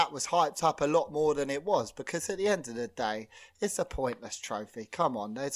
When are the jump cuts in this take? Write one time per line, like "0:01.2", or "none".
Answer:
none